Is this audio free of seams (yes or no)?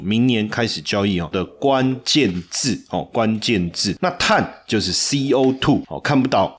no